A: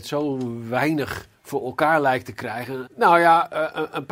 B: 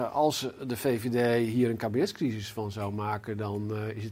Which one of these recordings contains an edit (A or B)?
A